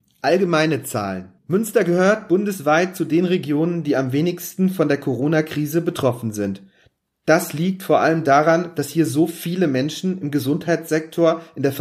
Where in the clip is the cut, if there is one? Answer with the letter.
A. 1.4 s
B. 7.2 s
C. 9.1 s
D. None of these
A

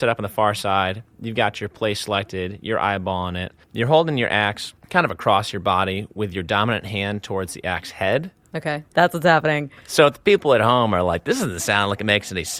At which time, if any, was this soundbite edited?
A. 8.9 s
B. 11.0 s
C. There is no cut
A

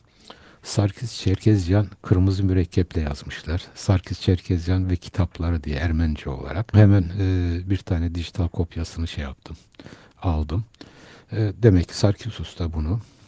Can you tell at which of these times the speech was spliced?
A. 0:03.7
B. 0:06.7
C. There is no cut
B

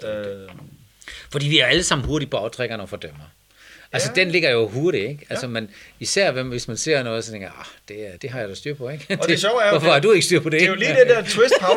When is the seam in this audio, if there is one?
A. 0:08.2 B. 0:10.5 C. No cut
A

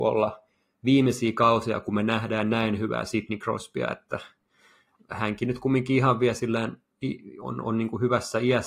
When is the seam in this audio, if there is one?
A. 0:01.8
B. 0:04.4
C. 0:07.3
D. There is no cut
D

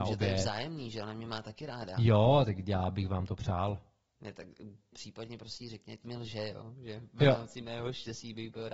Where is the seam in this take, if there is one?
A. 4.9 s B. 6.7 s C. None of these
A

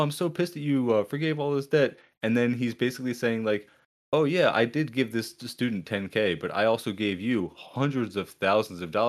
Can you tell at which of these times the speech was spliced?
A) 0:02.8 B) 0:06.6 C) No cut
C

